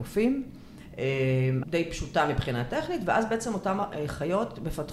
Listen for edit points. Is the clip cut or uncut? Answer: cut